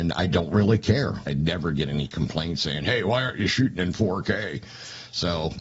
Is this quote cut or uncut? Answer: cut